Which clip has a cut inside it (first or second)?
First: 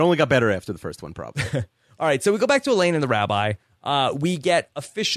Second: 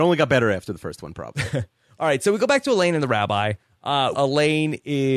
second